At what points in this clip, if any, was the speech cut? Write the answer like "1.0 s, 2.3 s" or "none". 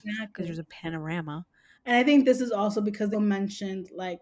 1.7 s, 3.1 s